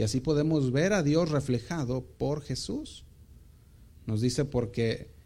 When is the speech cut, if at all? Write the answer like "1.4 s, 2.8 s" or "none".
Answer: 3.9 s